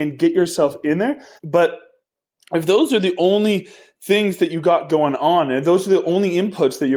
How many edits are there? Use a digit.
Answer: 1